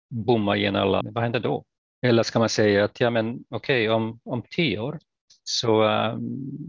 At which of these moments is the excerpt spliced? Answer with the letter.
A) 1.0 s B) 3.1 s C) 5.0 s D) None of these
A